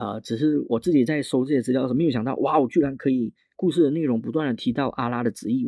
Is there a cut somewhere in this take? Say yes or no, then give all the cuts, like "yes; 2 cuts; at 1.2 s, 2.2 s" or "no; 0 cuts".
yes; 1 cut; at 3.5 s